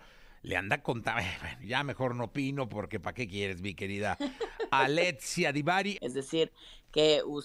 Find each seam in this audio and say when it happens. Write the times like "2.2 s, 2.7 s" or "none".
6.0 s